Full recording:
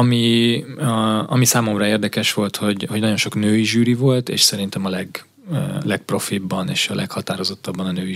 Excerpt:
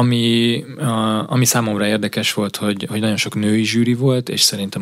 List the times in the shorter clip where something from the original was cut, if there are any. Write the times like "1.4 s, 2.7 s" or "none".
none